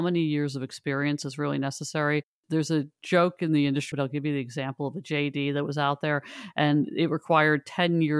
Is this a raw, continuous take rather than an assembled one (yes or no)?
no